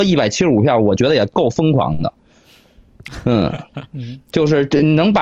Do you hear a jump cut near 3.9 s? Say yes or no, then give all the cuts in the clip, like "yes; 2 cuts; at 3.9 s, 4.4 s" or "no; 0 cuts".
yes; 1 cut; at 3.9 s